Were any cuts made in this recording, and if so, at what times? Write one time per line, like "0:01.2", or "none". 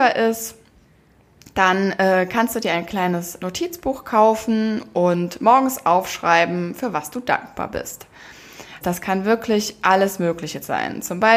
0:08.8